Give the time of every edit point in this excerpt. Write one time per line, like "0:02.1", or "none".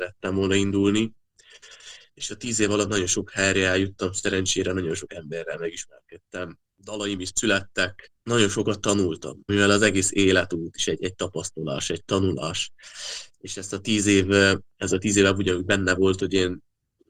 0:09.5